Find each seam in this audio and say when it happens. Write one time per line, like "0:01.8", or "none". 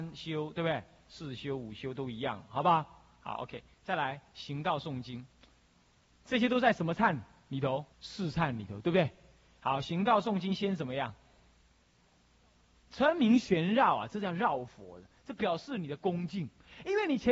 0:07.9

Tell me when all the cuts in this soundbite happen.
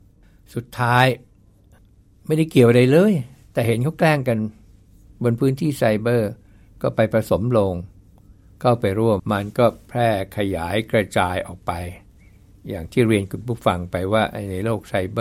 0:09.2

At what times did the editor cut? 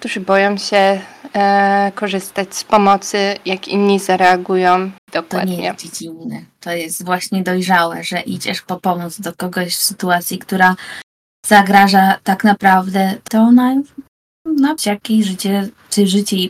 0:05.0
0:13.3
0:14.8

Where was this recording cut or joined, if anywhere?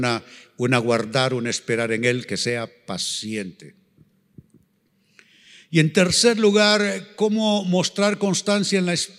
none

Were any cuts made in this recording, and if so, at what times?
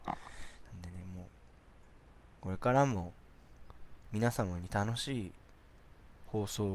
0:04.0

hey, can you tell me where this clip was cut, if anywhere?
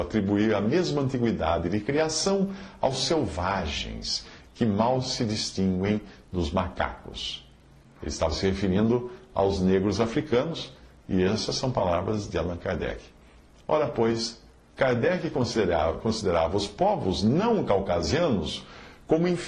none

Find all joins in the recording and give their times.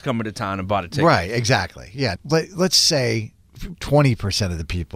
0:02.1
0:03.7

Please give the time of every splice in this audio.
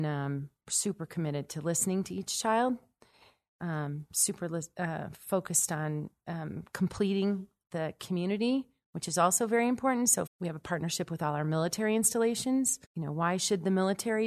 0:10.3
0:12.8

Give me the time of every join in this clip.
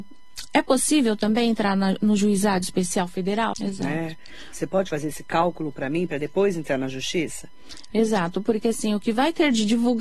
0:03.5

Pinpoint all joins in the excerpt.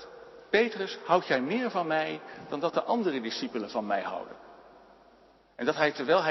none

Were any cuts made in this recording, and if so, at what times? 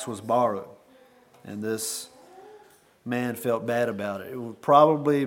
none

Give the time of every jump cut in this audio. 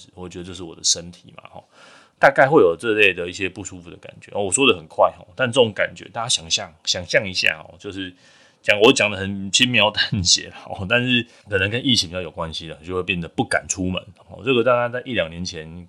0:11.4
0:14.2

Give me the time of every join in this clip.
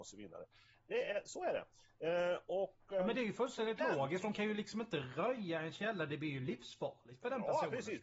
none

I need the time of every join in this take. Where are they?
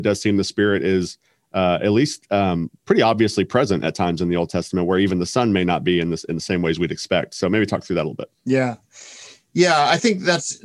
0:02.8
0:08.4

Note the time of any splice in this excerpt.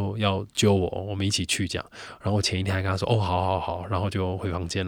none

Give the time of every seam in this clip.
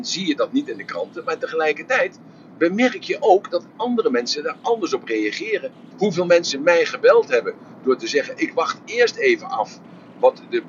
0:05.9

